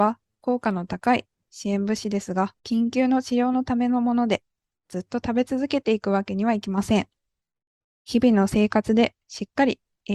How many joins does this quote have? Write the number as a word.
one